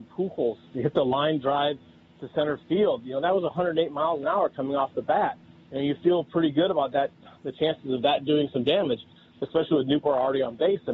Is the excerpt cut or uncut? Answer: uncut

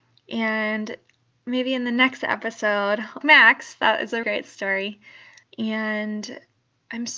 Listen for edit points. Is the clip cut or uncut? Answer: cut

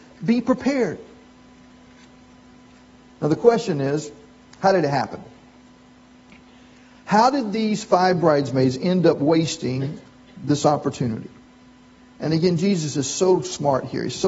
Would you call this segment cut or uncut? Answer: uncut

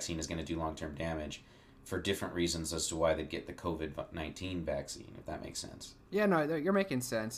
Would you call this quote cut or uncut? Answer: cut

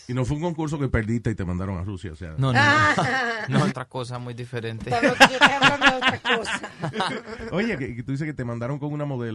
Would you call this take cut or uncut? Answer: cut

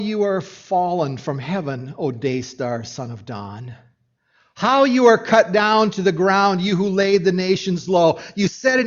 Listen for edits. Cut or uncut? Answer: uncut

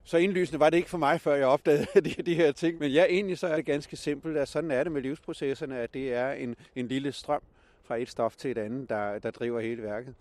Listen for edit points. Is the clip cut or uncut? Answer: uncut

